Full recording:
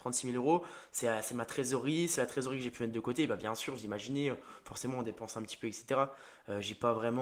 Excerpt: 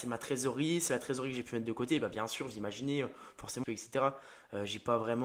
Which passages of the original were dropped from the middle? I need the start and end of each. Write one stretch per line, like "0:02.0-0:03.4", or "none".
0:04.9-0:05.6